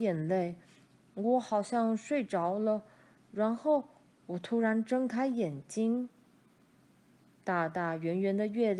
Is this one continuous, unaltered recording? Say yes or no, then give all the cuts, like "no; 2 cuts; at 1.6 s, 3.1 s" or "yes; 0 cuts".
yes; 0 cuts